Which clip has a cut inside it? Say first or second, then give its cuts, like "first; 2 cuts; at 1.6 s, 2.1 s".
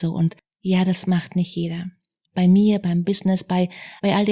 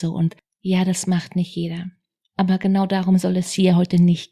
first; 1 cut; at 2.2 s